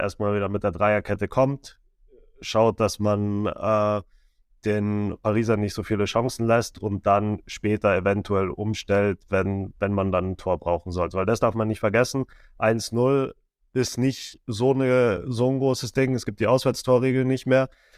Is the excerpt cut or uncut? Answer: uncut